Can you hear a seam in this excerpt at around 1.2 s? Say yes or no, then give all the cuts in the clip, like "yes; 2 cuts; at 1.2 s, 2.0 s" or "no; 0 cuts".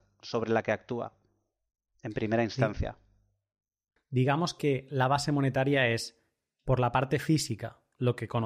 no; 1 cut; at 4.0 s